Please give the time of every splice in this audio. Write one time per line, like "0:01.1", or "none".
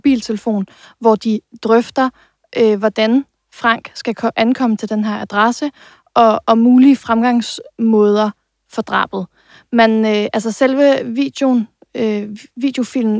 none